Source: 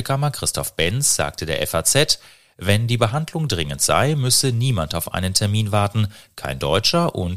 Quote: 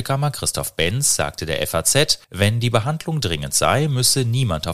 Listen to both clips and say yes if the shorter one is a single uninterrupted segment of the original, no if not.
no